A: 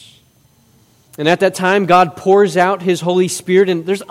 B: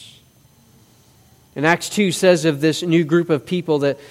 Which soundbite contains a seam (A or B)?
A